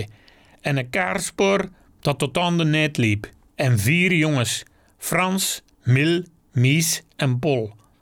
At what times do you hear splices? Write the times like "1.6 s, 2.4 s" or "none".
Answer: 3.5 s